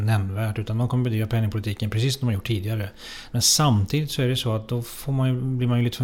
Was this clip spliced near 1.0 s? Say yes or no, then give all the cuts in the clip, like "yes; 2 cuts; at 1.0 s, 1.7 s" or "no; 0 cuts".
no; 1 cut; at 3.3 s